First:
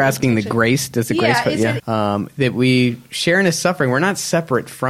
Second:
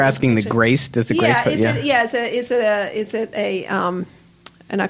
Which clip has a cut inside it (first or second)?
first